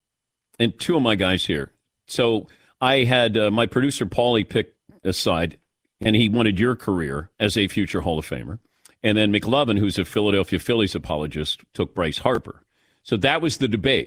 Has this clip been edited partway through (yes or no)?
no